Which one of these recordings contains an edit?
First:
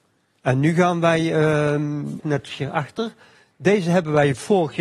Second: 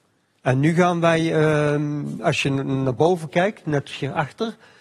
first; 1 cut; at 2.2 s

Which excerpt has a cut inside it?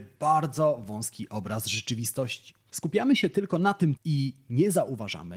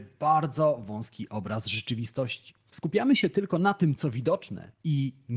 first; 1 cut; at 4.0 s

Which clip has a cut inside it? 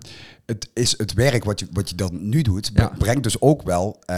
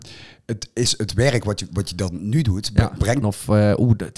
second; 1 cut; at 3.2 s

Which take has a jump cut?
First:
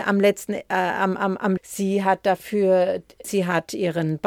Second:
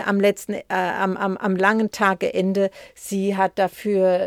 first; 2 cuts; at 1.6 s, 3.2 s

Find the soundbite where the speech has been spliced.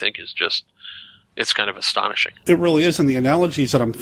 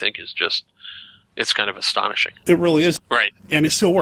second; 1 cut; at 3.0 s

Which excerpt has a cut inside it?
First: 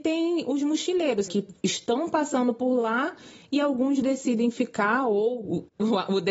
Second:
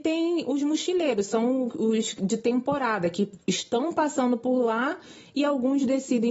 first; 1 cut; at 1.3 s

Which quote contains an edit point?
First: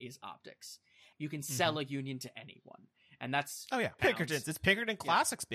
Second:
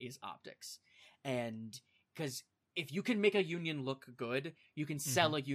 first; 2 cuts; at 1.1 s, 4.0 s

